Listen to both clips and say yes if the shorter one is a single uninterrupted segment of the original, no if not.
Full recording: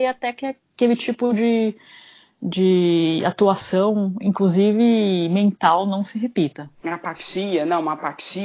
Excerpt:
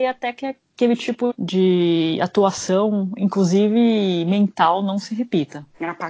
no